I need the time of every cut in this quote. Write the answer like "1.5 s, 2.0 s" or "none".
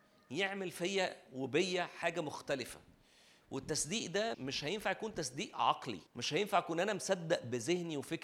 4.3 s, 6.1 s